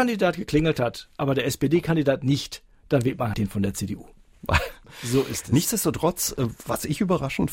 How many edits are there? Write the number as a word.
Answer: two